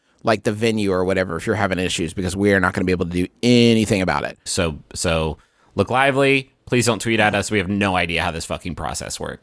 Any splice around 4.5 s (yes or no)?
yes